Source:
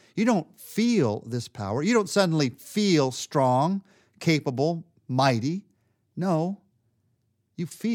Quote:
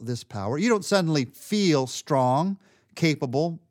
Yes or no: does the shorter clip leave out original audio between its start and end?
no